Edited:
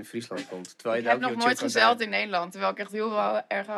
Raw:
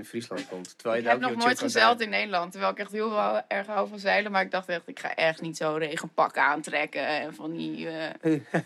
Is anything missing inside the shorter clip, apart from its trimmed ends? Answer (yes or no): no